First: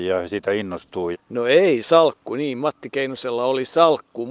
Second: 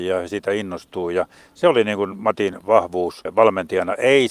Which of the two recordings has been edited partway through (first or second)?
first